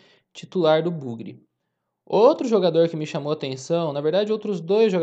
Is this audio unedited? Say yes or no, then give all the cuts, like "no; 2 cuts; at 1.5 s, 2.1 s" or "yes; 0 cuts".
yes; 0 cuts